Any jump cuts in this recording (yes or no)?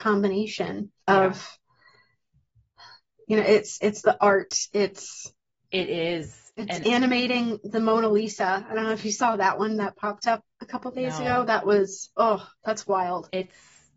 yes